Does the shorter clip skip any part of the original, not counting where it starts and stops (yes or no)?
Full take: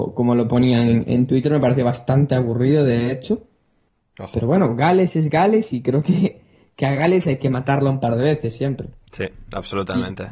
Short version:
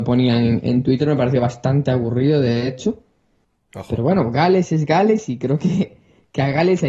no